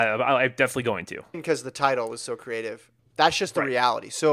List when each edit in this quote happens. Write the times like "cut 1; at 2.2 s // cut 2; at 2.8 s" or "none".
cut 1; at 1.3 s // cut 2; at 3.0 s